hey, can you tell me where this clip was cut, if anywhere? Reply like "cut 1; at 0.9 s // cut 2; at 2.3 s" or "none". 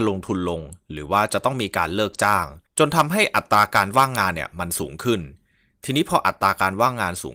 cut 1; at 2.7 s